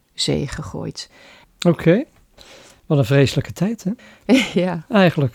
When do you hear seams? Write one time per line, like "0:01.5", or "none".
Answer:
0:01.4
0:04.0